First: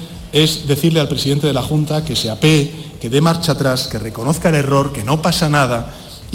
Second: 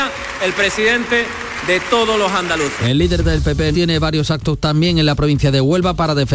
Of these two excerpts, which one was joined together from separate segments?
second; 1 cut; at 3.7 s

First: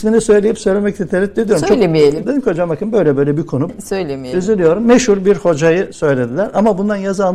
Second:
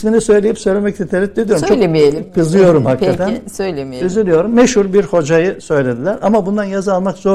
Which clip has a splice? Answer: first; 2 cuts; at 2.2 s, 3.7 s

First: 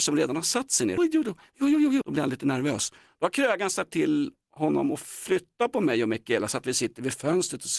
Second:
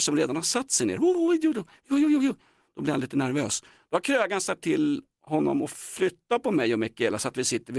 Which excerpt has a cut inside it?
first; 2 cuts; at 1.0 s, 2.0 s

